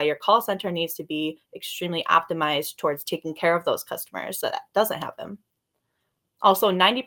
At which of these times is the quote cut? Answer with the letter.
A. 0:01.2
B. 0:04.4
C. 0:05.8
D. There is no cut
B